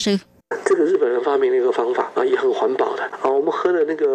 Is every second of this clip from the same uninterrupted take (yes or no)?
no